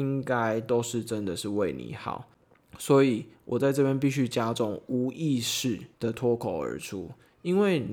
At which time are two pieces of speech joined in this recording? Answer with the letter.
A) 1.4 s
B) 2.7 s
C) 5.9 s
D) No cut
C